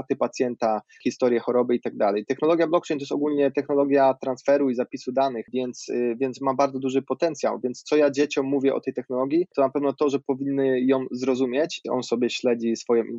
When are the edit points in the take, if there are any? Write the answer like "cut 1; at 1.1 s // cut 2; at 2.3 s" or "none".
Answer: cut 1; at 11.8 s